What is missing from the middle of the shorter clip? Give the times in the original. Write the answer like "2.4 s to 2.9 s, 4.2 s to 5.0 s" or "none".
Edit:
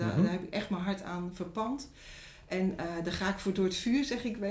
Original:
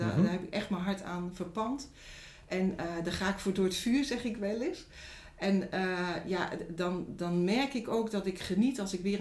none